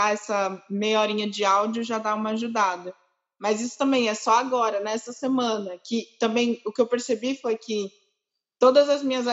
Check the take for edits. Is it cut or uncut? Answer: uncut